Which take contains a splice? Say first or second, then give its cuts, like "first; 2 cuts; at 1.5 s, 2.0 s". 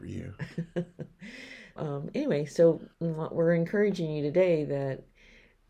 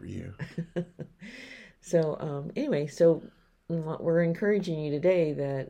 first; 2 cuts; at 1.8 s, 2.9 s